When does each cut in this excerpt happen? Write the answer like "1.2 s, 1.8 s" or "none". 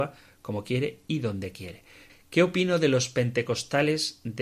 2.1 s